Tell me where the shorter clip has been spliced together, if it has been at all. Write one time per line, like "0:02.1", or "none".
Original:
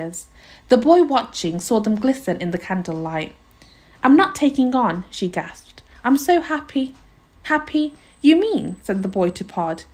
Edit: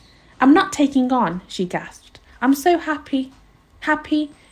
none